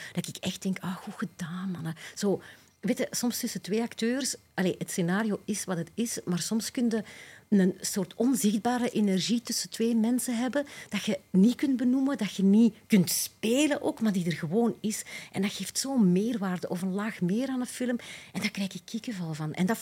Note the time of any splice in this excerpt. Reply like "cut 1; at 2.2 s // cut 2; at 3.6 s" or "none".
none